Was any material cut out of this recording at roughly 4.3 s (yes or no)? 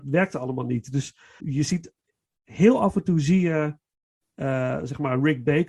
no